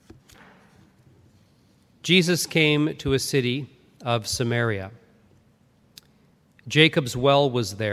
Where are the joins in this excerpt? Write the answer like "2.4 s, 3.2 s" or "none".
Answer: none